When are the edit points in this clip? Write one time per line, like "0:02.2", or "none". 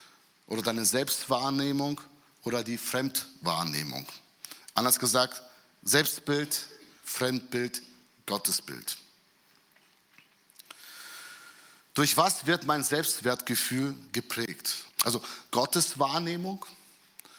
0:14.9